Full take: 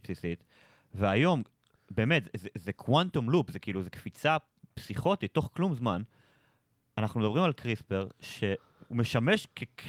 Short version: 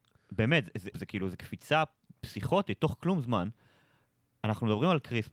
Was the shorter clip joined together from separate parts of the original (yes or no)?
yes